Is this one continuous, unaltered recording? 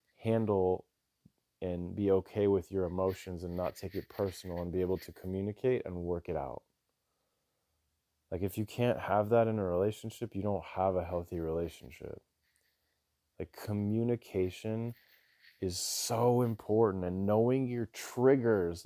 yes; 0 cuts

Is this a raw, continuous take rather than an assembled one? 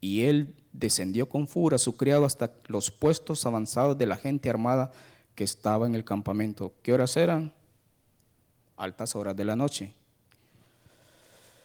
yes; 0 cuts

